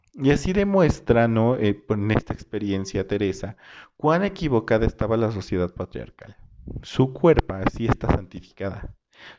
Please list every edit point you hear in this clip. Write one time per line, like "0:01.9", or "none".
none